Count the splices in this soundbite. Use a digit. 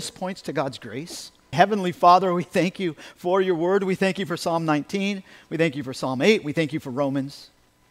1